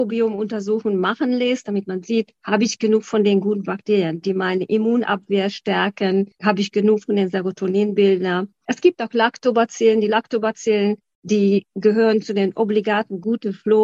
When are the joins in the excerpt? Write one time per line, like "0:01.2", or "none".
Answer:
none